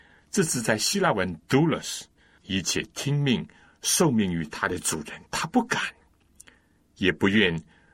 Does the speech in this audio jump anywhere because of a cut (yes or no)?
yes